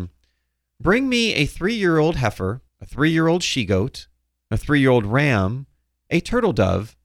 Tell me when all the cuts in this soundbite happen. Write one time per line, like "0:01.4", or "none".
0:02.7